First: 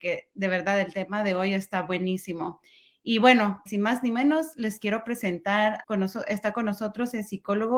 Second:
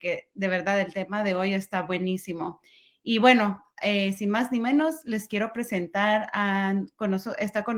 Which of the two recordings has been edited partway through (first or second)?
first